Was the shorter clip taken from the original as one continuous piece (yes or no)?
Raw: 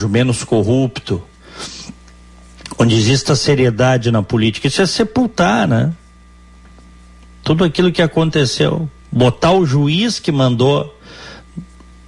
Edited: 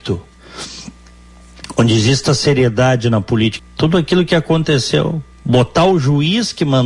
no